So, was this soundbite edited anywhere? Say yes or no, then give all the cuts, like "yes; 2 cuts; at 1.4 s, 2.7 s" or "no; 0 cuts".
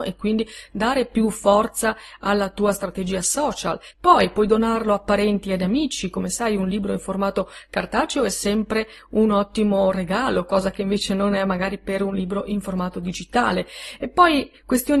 no; 0 cuts